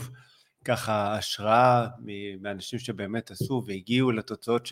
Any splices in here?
no; 0 cuts

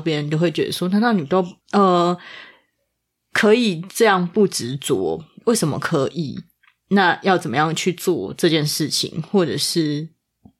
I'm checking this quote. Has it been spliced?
yes; 1 cut; at 1.6 s

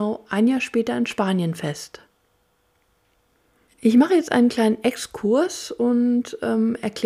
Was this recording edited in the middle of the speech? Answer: no; 0 cuts

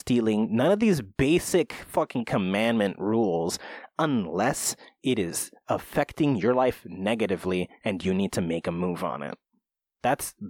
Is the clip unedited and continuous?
yes; 0 cuts

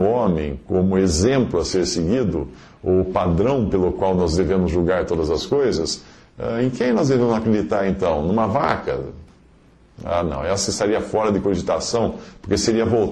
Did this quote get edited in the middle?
no; 0 cuts

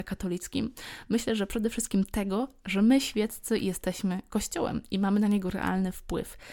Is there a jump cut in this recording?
no; 0 cuts

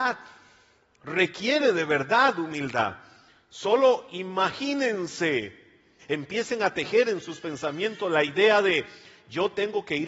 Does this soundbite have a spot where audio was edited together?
yes; 1 cut; at 6.0 s

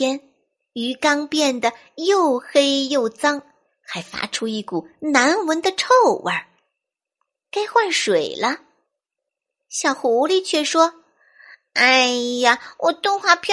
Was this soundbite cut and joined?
no; 0 cuts

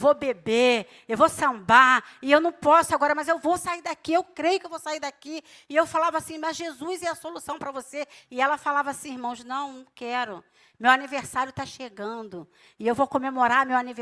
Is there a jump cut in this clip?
yes; 1 cut; at 8.2 s

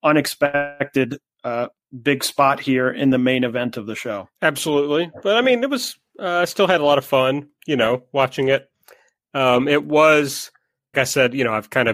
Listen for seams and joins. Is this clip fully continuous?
no; 2 cuts; at 4.3 s, 10.9 s

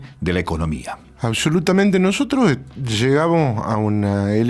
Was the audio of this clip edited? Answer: no; 0 cuts

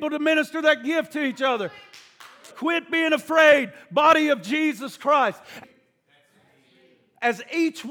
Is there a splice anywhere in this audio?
yes; 2 cuts; at 2.5 s, 5.6 s

